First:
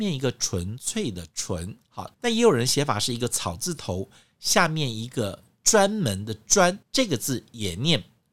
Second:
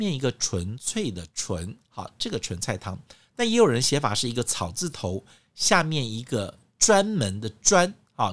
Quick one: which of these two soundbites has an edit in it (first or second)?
first